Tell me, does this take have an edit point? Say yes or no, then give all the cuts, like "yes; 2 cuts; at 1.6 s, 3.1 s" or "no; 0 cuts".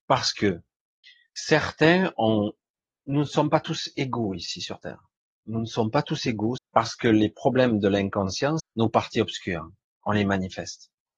yes; 2 cuts; at 6.6 s, 8.6 s